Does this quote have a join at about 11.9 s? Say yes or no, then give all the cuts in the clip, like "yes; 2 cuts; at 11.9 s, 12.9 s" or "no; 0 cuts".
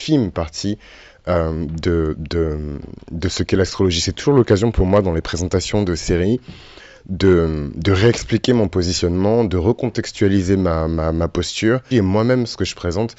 yes; 1 cut; at 11.9 s